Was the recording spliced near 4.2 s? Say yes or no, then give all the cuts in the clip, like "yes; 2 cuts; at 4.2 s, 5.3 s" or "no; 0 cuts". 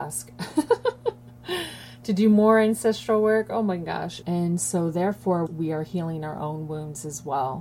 yes; 2 cuts; at 4.2 s, 5.5 s